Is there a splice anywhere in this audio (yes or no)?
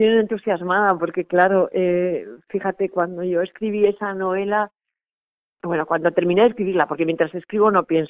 no